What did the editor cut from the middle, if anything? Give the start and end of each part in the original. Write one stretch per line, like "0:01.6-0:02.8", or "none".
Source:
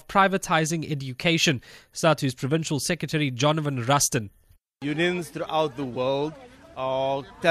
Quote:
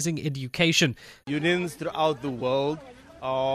0:01.9-0:04.8